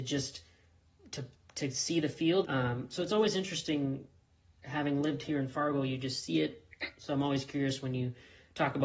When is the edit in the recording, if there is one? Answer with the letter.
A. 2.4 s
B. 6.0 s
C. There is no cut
A